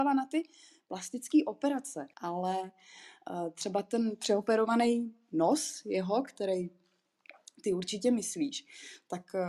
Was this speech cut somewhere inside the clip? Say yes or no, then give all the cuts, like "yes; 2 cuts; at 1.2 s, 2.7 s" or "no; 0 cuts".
yes; 1 cut; at 2.1 s